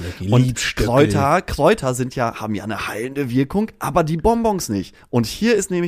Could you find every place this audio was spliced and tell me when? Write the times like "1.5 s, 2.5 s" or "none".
none